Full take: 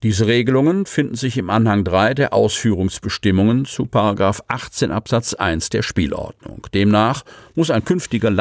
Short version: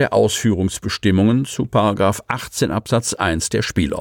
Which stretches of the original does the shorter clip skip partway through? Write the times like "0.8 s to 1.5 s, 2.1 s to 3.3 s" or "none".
none